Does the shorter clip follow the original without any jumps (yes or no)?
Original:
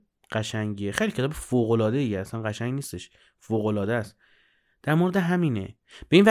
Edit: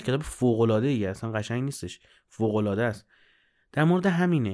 yes